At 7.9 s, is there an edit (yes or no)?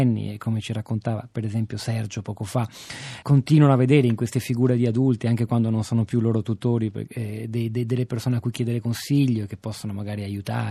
no